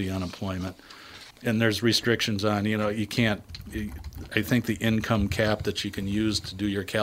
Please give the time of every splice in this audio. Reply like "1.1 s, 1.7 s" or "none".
1.3 s

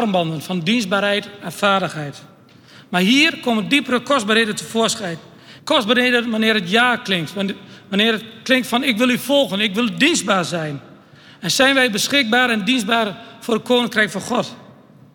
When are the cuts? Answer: 5.6 s

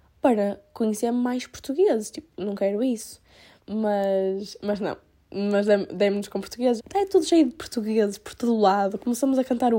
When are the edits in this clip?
3.6 s, 6.8 s

